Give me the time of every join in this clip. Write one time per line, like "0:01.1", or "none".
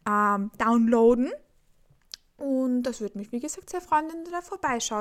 none